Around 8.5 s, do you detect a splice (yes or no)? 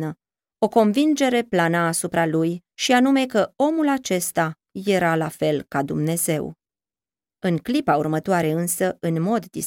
no